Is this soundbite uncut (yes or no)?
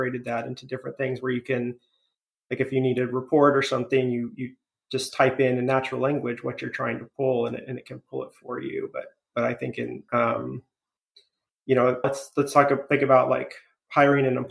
no